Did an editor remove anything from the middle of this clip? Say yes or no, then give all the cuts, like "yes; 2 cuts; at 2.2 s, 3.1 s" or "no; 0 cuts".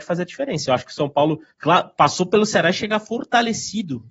yes; 1 cut; at 1.5 s